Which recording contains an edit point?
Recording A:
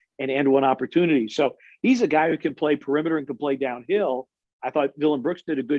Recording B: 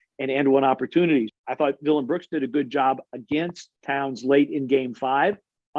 B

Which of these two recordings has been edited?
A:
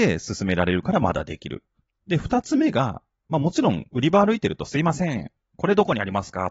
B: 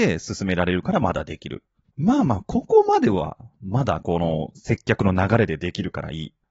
B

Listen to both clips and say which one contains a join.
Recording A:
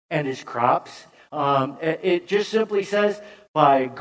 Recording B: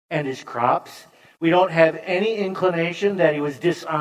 A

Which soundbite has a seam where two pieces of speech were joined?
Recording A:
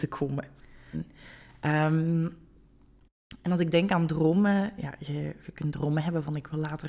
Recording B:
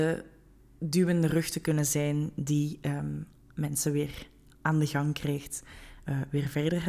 A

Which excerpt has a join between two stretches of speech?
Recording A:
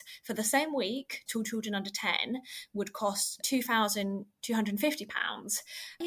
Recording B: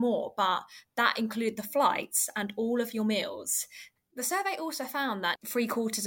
A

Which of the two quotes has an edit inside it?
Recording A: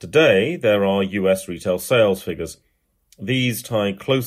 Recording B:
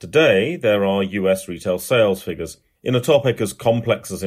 B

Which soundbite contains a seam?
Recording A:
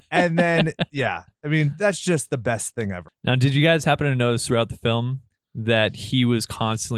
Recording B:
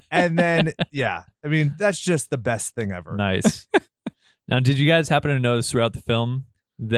A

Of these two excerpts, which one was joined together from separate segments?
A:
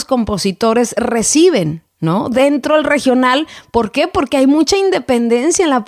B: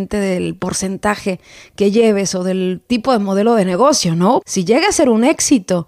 B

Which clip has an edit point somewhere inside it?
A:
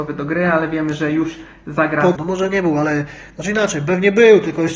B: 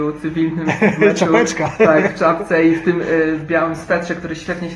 A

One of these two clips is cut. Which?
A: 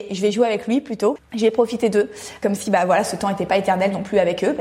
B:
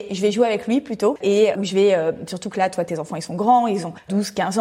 A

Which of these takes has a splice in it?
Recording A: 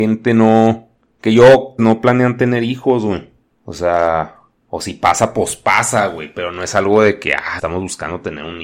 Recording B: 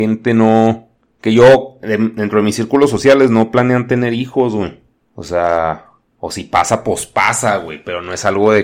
A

